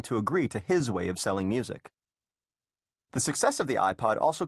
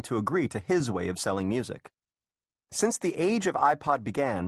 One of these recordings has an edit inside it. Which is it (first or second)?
second